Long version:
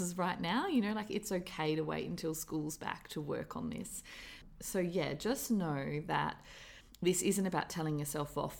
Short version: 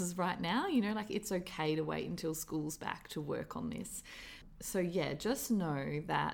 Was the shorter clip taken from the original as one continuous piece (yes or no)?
yes